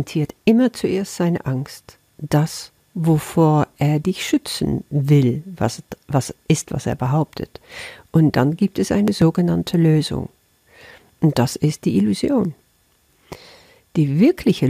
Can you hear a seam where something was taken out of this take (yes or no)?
no